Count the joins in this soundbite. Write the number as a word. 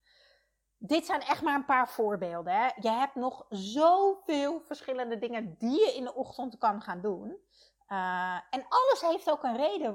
zero